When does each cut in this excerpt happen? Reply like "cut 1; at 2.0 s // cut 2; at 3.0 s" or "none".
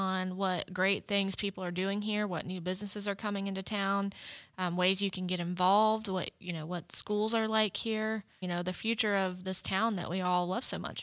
cut 1; at 8.4 s